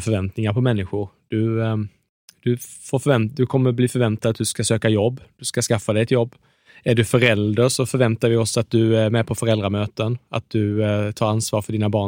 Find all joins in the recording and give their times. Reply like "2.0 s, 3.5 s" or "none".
none